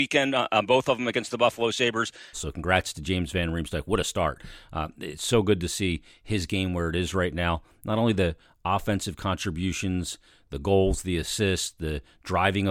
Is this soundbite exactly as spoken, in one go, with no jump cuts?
no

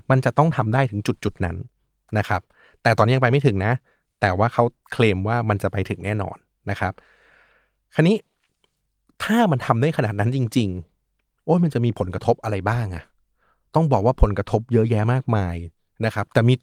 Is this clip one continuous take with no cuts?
yes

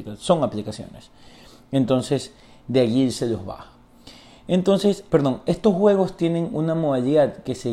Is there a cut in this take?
yes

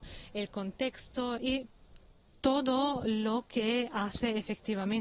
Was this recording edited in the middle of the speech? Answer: yes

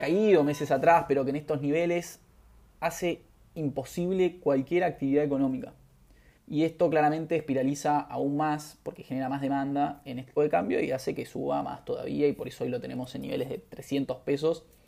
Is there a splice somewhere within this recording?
yes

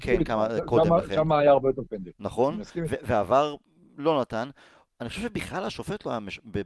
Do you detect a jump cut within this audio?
no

